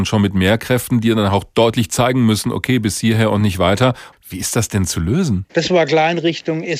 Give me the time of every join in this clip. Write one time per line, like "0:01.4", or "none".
0:04.1
0:05.5